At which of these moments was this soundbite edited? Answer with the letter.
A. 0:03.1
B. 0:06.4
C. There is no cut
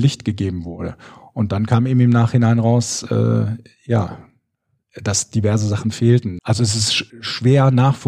B